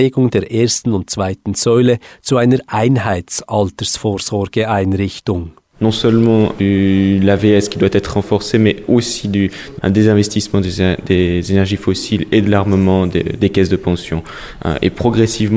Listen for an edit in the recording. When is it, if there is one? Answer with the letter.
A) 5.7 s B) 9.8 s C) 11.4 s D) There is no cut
B